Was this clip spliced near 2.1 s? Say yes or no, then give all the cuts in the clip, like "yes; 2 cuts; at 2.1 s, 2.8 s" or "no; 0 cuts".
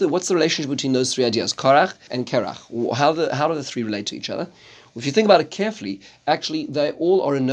yes; 1 cut; at 2.1 s